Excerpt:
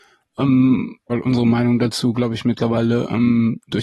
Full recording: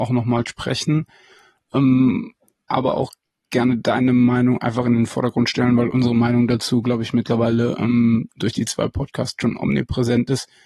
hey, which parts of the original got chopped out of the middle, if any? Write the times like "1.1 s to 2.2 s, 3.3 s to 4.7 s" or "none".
2.4 s to 5.8 s